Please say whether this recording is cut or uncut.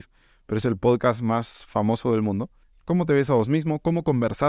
cut